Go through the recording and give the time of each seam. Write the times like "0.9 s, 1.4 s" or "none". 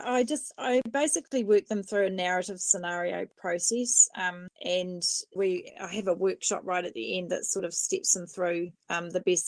5.4 s